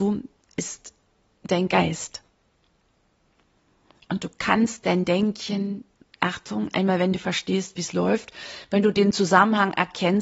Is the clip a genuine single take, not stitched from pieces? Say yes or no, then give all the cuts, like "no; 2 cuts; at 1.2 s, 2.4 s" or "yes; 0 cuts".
no; 1 cut; at 6.7 s